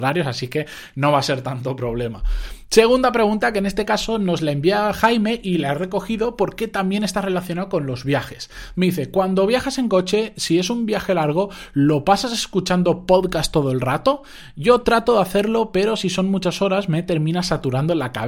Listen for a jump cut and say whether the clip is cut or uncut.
uncut